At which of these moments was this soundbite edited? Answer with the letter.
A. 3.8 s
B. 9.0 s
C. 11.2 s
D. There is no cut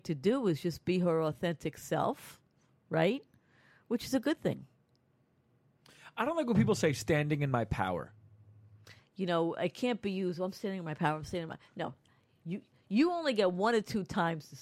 B